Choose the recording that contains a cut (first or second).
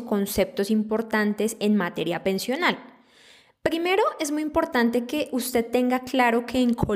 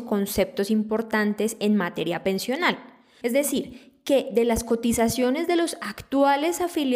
second